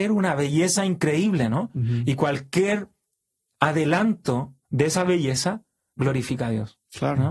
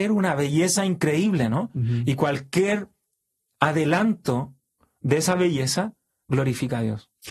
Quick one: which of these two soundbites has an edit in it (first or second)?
first